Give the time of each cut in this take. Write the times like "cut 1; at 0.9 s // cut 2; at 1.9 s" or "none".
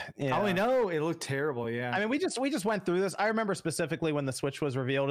none